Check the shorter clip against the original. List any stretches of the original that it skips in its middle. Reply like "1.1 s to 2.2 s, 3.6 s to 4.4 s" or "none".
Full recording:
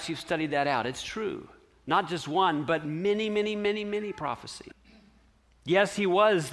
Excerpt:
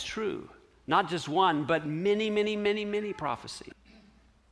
none